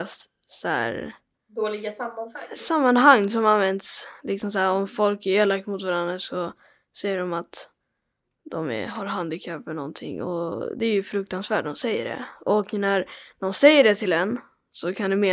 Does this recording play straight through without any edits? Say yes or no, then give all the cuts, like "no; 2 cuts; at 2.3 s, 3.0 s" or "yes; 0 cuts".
yes; 0 cuts